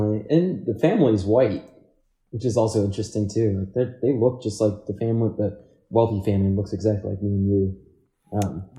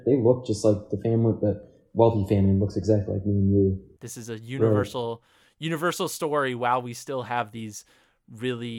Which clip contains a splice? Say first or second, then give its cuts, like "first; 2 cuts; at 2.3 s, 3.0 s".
second; 1 cut; at 4.0 s